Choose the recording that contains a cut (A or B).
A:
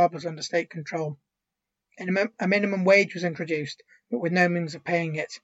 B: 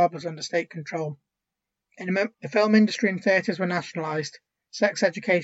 B